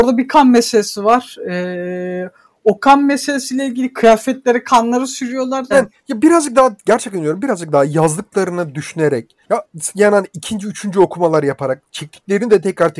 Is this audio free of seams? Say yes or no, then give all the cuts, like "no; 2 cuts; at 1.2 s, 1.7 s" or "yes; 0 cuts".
no; 2 cuts; at 5.7 s, 9.4 s